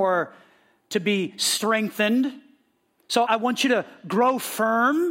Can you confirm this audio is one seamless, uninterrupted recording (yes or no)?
no